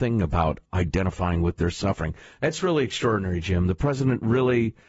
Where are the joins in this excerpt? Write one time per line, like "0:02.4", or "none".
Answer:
none